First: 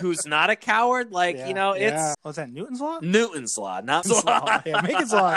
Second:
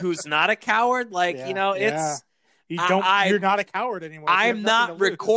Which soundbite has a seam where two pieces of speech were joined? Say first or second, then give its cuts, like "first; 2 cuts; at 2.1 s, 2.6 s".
first; 2 cuts; at 2.1 s, 4.0 s